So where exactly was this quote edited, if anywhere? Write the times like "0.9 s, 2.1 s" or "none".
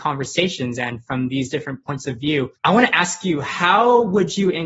2.6 s

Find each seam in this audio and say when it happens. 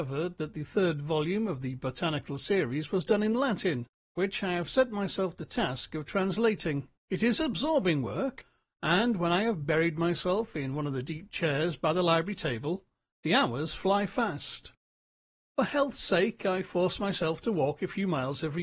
7.0 s

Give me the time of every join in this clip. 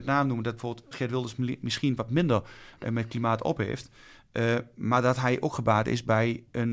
0.9 s

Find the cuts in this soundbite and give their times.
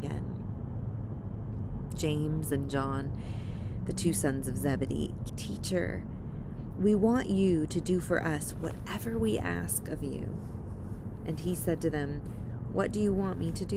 5.3 s

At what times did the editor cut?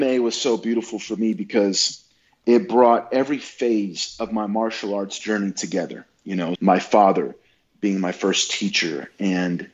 6.6 s

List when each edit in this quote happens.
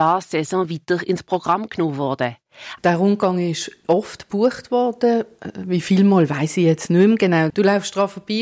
2.8 s, 7.5 s

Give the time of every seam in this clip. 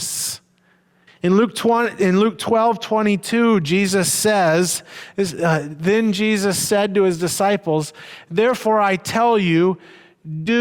1.1 s

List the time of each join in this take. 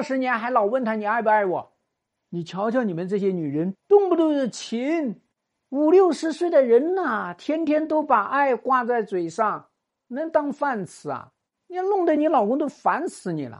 2.1 s, 3.7 s

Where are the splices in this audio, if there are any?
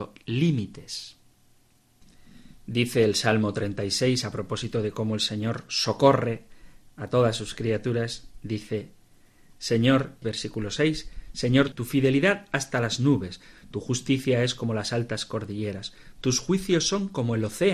10.2 s, 11.7 s

